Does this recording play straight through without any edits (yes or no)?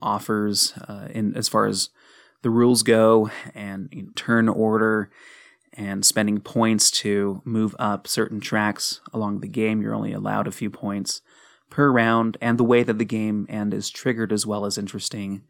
no